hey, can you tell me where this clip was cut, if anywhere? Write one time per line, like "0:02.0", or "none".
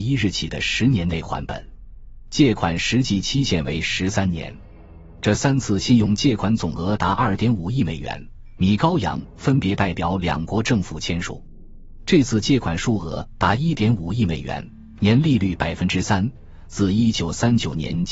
0:08.6
0:12.0

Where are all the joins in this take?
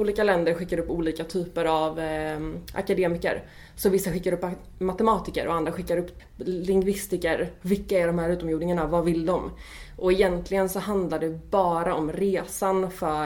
0:06.2
0:07.6

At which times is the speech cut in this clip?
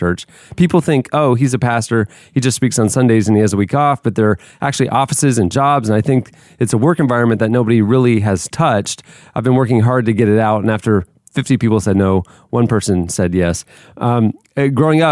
none

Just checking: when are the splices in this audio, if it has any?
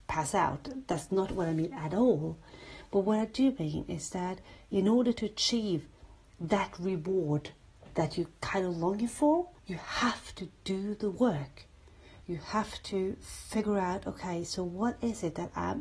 0:09.6

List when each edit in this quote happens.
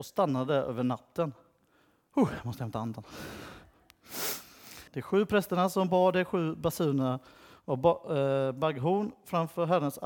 0:04.9

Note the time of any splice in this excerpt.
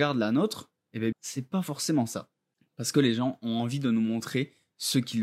0:01.1

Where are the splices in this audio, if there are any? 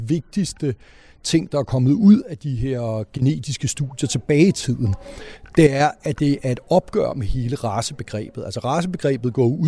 none

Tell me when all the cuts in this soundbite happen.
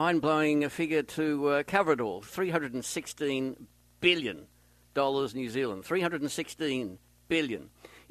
none

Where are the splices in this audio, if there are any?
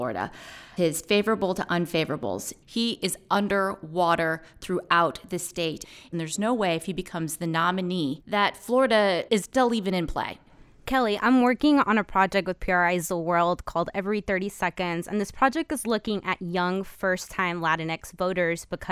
none

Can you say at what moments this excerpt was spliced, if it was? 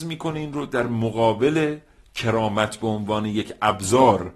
none

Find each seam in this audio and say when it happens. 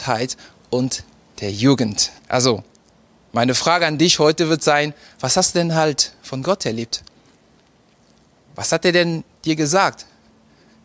0:02.2

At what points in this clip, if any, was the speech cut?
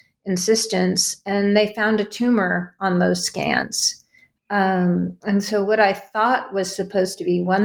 none

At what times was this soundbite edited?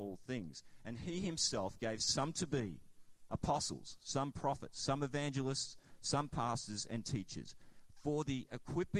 none

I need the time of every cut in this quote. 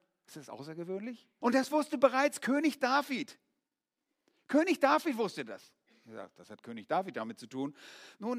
0:01.4

